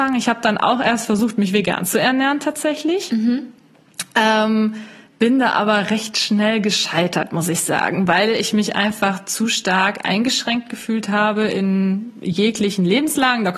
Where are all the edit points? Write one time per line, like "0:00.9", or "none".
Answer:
none